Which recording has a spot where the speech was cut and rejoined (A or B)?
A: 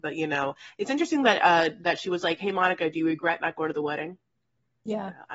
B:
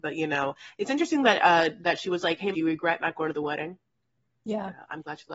B